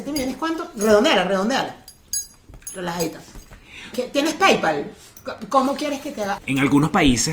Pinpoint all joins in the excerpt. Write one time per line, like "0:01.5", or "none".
0:03.9
0:06.4